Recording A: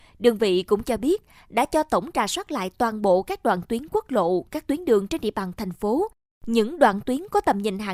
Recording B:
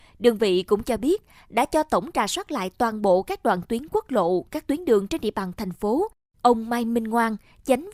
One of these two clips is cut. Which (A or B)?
B